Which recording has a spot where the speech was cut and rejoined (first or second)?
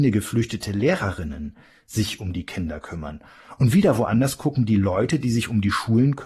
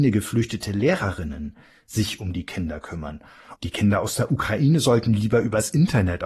second